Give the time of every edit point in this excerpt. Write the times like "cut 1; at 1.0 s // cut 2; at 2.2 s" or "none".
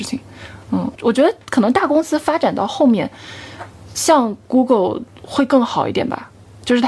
cut 1; at 1.0 s